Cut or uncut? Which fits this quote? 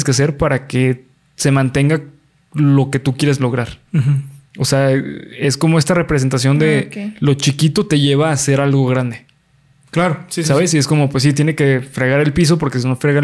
uncut